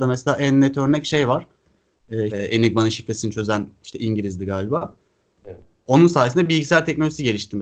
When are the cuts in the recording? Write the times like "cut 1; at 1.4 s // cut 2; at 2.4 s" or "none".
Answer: cut 1; at 2.3 s